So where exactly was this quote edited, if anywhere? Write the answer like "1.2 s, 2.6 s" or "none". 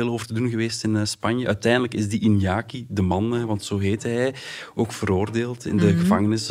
none